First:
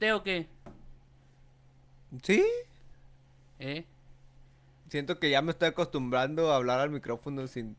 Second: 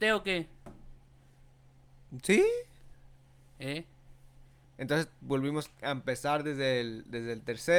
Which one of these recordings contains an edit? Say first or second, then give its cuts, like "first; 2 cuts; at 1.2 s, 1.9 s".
second; 1 cut; at 4.6 s